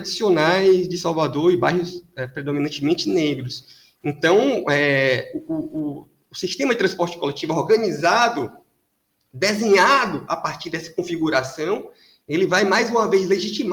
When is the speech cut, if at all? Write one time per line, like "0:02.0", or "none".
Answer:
none